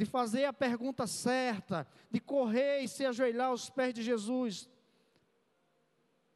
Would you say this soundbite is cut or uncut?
uncut